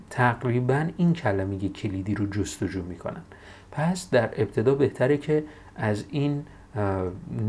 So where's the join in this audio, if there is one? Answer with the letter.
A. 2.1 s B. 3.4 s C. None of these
C